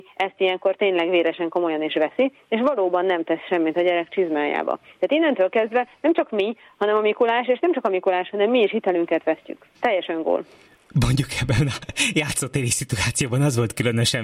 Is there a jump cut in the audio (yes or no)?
yes